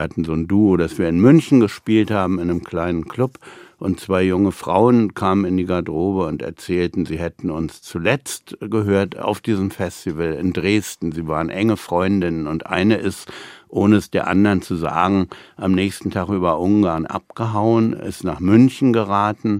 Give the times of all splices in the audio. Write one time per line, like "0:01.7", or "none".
none